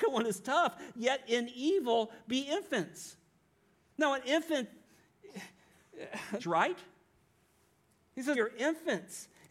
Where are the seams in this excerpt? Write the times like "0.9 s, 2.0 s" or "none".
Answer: 6.4 s, 8.3 s